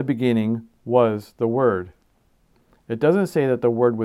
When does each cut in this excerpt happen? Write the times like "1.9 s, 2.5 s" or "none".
none